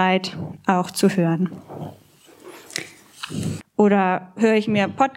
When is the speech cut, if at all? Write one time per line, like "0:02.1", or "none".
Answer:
0:03.6